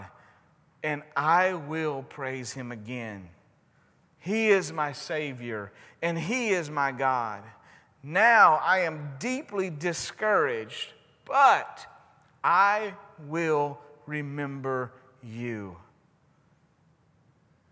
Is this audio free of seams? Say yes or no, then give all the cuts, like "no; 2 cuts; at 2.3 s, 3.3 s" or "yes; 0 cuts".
yes; 0 cuts